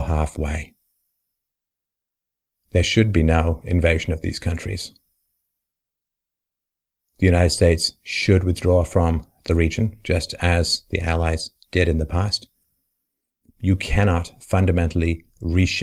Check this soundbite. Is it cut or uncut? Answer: uncut